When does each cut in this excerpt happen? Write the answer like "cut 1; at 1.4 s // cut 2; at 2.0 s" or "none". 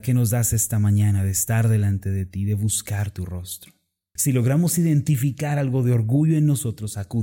cut 1; at 4.2 s